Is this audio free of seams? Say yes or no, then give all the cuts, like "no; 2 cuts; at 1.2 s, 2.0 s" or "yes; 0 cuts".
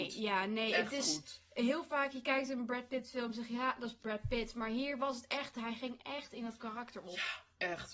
yes; 0 cuts